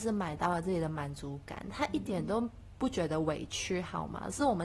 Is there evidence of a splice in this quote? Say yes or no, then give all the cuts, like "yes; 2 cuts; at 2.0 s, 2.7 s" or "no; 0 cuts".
no; 0 cuts